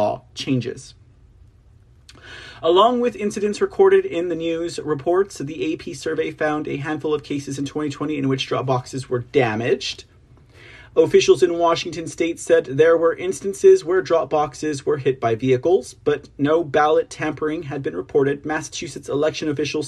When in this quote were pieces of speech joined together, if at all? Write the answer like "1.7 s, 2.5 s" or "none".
none